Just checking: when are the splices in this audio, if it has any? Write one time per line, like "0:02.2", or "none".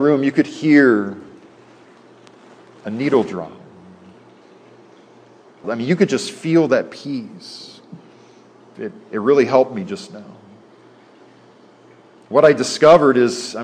0:05.6
0:08.7